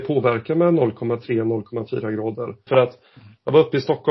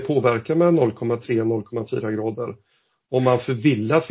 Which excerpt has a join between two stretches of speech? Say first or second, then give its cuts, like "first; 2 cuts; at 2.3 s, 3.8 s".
first; 1 cut; at 2.7 s